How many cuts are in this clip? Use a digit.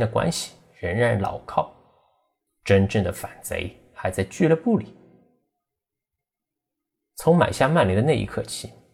1